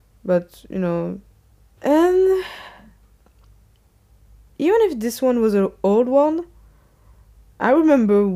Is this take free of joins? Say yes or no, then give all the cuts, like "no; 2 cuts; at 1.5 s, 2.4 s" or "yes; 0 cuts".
no; 1 cut; at 1.8 s